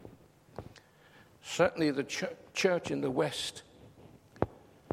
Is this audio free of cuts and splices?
yes; 0 cuts

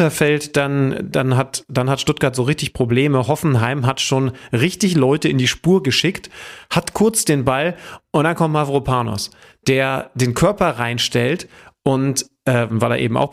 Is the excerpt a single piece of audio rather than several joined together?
yes; 0 cuts

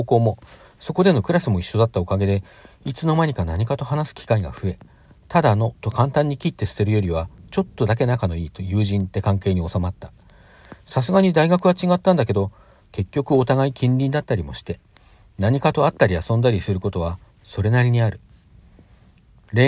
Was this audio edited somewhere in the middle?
no; 0 cuts

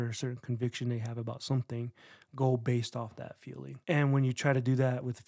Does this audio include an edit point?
yes; 1 cut; at 3.8 s

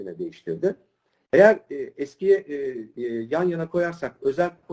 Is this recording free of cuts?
no; 1 cut; at 3.0 s

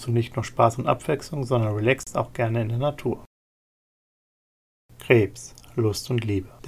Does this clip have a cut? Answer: no; 0 cuts

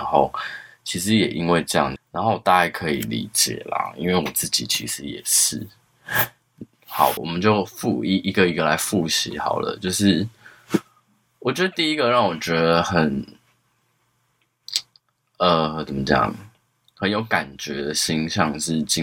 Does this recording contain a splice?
yes; 2 cuts; at 2.0 s, 7.2 s

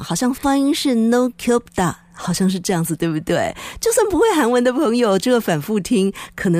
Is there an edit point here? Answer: no; 0 cuts

